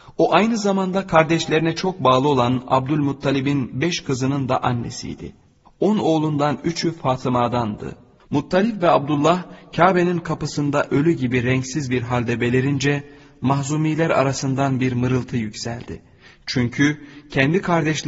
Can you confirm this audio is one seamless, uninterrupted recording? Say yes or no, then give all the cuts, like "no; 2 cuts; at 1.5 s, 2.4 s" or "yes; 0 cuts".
no; 2 cuts; at 5.7 s, 8.2 s